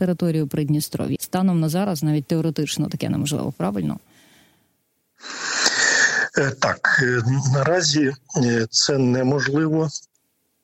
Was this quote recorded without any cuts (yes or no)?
no